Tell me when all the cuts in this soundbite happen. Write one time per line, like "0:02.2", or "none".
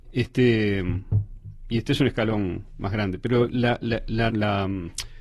0:04.3